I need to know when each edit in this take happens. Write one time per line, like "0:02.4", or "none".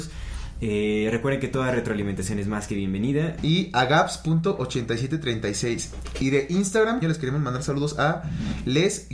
0:03.4
0:07.0